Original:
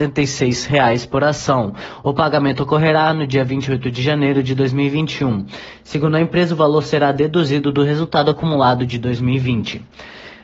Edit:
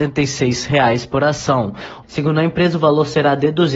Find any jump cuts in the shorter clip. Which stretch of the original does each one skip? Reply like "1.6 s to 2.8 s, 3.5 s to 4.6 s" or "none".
2.0 s to 5.8 s

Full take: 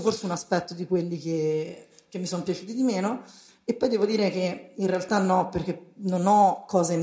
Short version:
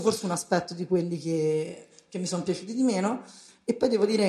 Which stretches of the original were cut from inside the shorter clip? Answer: none

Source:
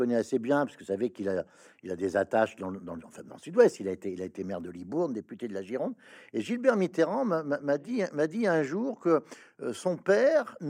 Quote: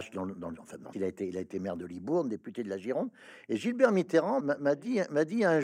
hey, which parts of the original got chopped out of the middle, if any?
3.4 s to 3.8 s, 7.2 s to 7.4 s

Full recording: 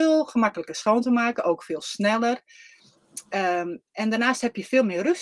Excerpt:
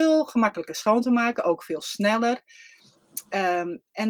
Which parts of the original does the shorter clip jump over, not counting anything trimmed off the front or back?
none

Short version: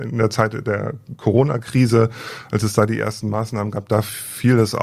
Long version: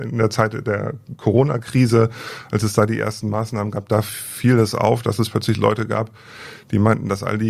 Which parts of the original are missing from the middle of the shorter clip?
none

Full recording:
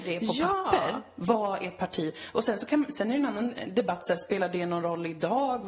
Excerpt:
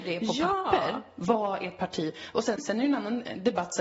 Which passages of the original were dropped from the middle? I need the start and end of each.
2.6 s to 2.9 s

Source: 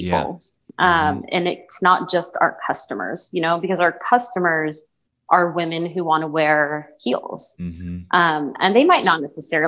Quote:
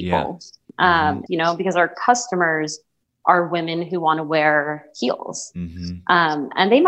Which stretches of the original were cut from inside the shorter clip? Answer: 1.3 s to 3.3 s

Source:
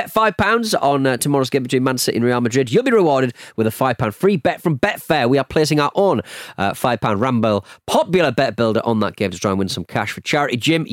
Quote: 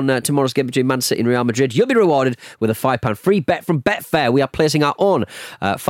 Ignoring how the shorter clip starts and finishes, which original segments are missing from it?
none

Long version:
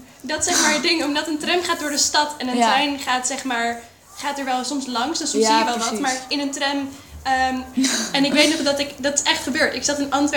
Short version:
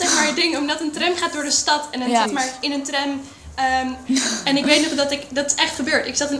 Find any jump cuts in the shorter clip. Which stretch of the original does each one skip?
2.7 s to 5.9 s

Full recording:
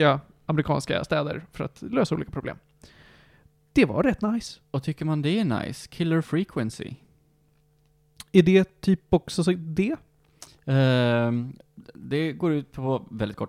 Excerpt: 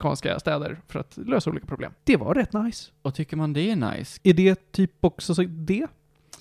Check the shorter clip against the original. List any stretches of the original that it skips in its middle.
2.6 s to 3.7 s, 5.9 s to 8.3 s

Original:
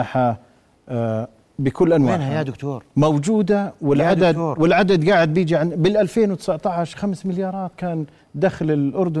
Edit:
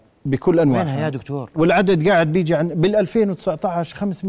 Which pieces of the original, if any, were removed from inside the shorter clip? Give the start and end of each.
2.9 s to 4.5 s

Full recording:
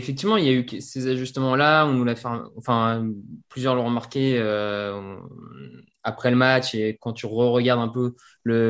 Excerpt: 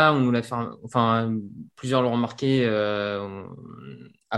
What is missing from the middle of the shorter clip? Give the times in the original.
none

